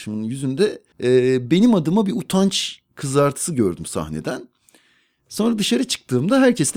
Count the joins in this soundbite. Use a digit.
1